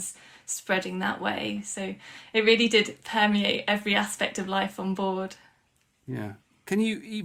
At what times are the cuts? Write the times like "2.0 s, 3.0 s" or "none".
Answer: none